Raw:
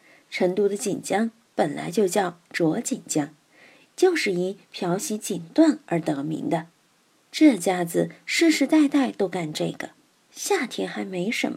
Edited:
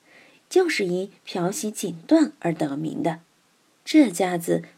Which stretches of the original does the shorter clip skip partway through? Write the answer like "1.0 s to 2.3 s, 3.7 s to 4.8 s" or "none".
none